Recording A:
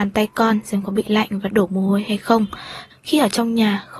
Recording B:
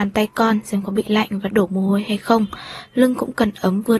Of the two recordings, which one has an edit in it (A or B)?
A